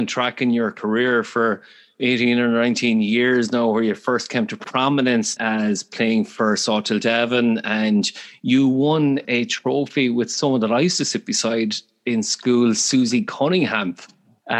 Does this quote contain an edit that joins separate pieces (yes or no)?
yes